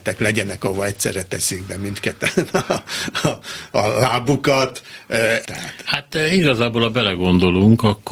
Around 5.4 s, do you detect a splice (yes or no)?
yes